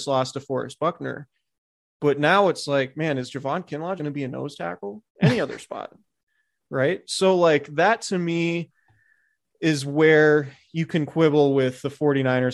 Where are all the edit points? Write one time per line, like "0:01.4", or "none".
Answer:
0:04.0
0:05.1